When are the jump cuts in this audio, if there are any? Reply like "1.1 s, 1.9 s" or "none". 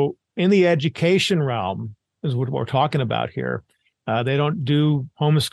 3.9 s